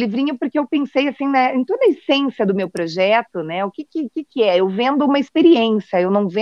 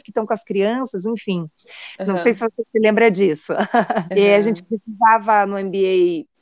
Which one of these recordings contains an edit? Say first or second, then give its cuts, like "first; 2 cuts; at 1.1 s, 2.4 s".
second; 2 cuts; at 1.9 s, 4.1 s